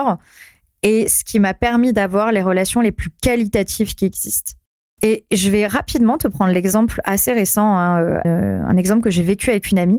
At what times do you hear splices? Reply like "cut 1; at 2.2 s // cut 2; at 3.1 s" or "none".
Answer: cut 1; at 8.2 s